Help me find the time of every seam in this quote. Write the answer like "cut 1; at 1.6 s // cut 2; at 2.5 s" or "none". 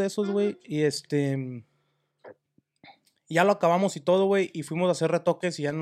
none